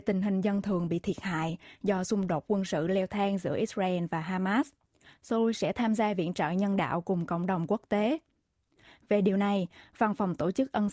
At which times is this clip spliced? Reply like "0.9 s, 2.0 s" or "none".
none